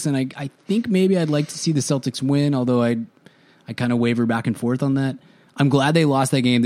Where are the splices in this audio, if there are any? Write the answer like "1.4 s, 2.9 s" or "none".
none